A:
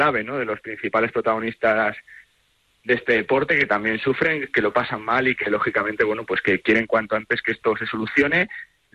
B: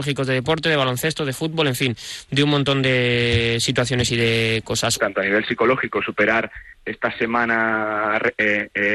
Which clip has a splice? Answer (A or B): B